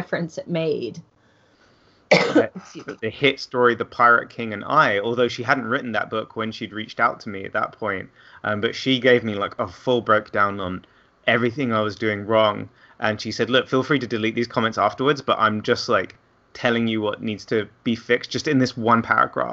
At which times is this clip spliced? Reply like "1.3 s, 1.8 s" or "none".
3.0 s